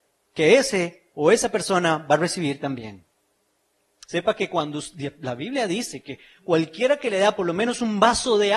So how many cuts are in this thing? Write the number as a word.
one